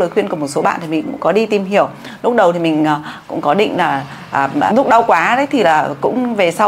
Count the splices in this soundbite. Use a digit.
1